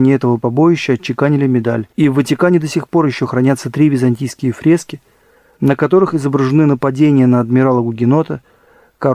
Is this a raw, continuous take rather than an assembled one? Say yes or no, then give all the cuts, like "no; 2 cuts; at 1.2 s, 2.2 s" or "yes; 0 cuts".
no; 1 cut; at 1.9 s